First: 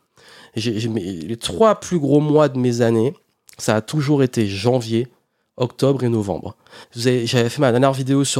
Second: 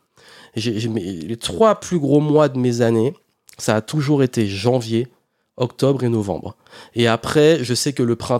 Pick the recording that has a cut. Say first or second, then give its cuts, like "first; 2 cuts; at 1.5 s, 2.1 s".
first; 1 cut; at 6.8 s